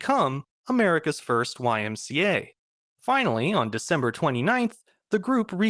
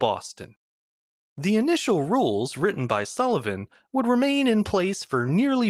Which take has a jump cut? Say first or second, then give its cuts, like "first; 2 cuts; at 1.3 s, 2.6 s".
first; 1 cut; at 2.8 s